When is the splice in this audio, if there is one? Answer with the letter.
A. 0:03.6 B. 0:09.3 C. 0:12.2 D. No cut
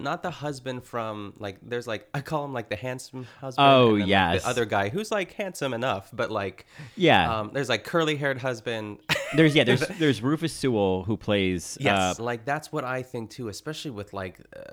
C